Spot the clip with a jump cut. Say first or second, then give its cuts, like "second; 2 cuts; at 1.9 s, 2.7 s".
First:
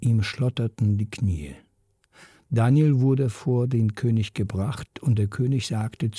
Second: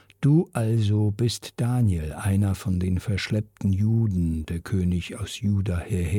second; 1 cut; at 4.4 s